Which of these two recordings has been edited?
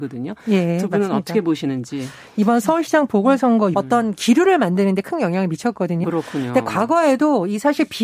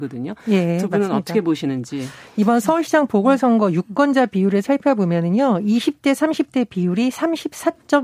first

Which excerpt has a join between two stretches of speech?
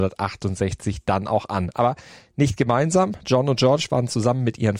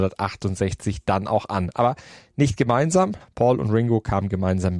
second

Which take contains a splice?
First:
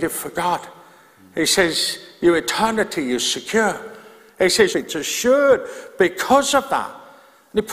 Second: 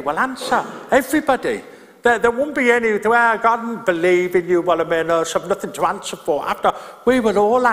first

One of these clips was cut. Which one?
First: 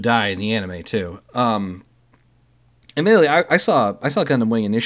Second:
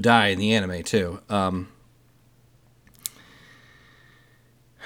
first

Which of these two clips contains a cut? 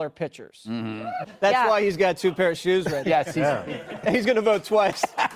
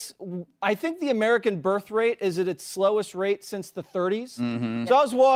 first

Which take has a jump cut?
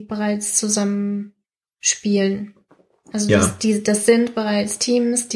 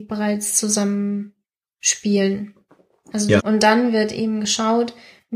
second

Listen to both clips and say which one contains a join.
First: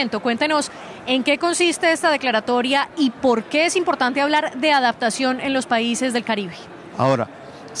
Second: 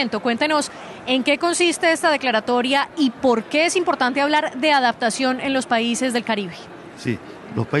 first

